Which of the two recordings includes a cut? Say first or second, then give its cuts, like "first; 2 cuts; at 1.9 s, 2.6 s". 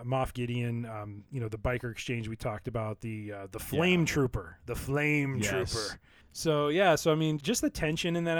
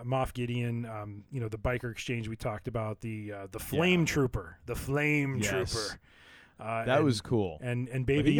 first; 2 cuts; at 6.2 s, 7.4 s